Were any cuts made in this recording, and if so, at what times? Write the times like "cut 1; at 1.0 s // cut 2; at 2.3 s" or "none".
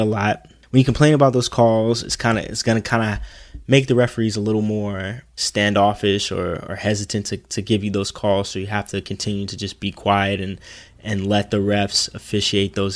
none

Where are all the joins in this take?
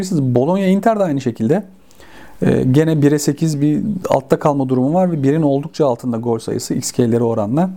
none

